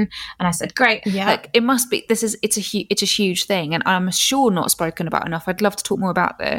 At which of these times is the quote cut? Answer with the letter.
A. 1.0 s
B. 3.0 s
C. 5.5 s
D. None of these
A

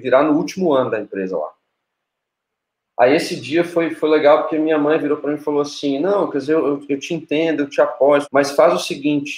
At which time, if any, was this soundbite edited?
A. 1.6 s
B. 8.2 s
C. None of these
B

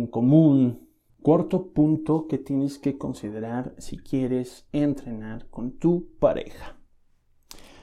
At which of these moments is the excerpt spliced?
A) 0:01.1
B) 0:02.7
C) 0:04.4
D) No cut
A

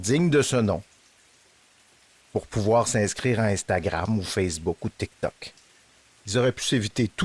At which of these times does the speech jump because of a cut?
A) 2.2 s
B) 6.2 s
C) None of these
B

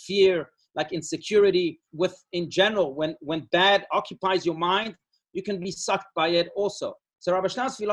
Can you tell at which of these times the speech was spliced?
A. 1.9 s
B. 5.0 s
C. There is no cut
A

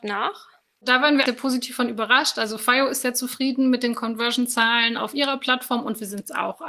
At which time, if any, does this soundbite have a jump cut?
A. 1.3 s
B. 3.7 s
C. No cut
A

